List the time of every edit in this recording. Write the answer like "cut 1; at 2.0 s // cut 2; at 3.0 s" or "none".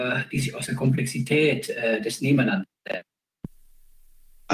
none